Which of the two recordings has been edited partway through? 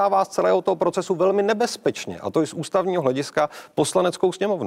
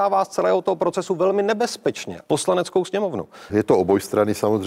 second; 2 cuts; at 2.2 s, 3.5 s

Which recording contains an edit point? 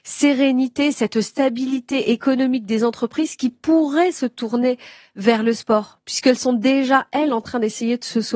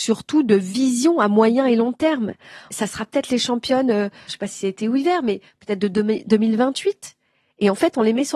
second; 2 cuts; at 2.7 s, 4.3 s

